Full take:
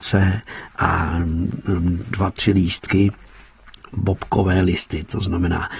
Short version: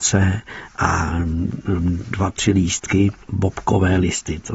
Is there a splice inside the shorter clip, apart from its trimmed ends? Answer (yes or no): yes